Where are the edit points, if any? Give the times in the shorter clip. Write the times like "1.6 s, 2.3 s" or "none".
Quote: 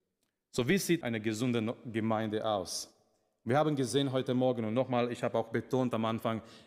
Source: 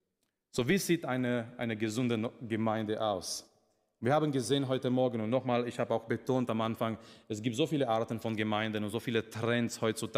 1.0 s